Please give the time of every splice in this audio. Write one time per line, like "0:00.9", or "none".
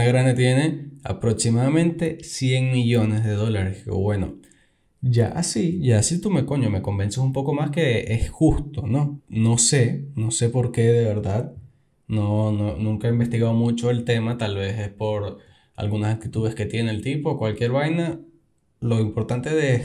0:09.2

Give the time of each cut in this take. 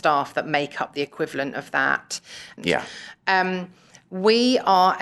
0:02.6

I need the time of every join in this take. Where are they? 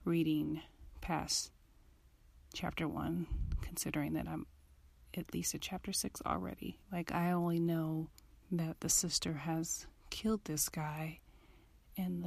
0:06.8
0:08.4

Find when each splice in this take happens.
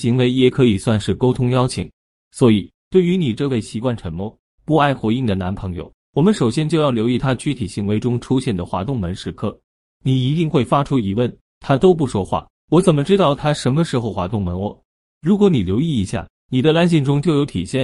none

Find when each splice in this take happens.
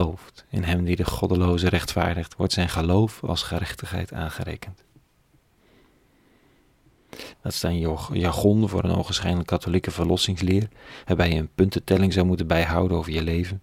0:07.3

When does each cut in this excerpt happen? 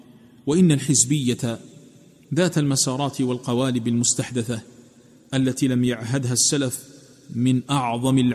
none

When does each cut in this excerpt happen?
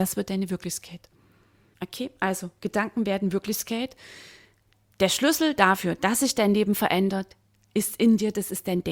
none

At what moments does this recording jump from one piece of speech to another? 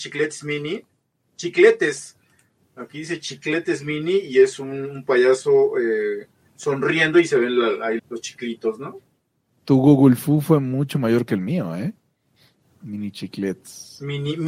0:08.0

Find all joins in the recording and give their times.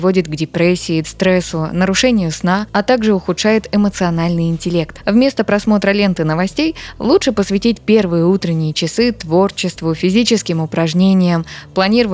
0:01.0

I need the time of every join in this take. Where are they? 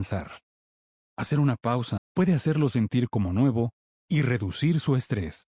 0:02.0

